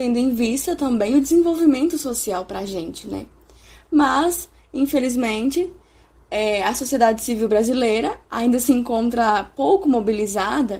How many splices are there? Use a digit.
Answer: 0